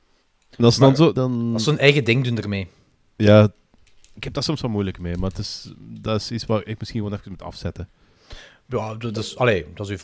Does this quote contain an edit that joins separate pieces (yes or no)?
yes